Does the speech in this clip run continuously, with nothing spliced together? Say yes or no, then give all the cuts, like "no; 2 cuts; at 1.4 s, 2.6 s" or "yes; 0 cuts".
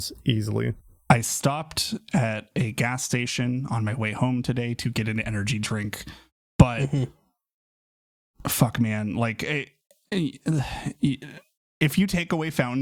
yes; 0 cuts